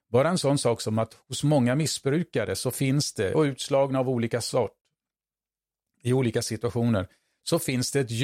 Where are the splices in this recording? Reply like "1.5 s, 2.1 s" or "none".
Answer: none